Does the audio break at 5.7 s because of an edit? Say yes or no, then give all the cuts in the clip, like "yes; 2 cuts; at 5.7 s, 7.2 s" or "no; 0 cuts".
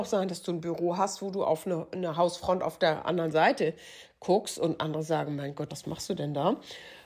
yes; 1 cut; at 5.7 s